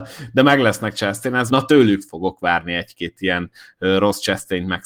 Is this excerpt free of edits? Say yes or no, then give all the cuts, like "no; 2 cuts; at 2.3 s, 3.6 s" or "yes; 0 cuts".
no; 1 cut; at 1.5 s